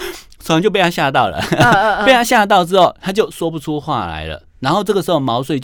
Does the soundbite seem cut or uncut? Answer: uncut